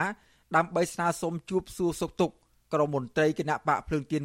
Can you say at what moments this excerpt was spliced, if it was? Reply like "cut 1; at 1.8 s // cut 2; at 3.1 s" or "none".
cut 1; at 2.9 s